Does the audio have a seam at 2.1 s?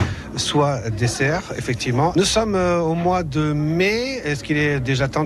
yes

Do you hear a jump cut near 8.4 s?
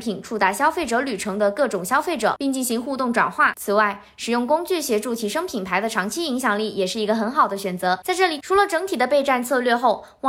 yes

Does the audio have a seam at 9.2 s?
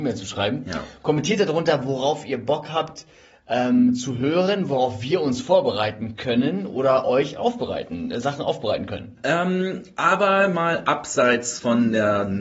yes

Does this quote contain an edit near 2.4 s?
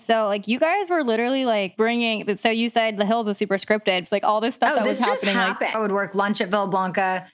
no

